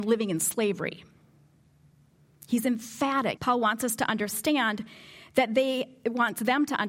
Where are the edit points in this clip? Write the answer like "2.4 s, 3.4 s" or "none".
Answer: 3.4 s